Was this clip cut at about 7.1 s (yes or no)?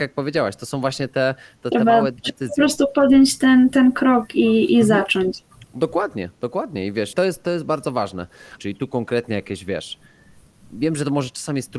yes